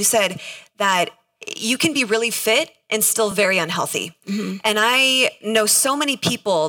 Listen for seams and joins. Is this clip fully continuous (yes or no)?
yes